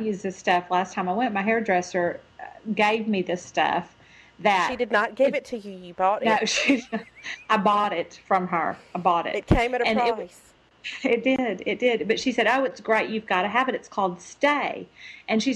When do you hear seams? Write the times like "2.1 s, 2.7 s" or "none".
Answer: none